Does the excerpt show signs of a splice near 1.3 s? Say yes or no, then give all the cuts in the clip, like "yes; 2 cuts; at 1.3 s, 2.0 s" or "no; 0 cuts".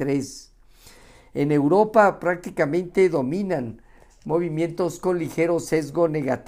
no; 0 cuts